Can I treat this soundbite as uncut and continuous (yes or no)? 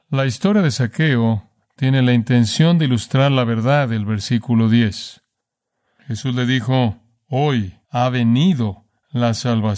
no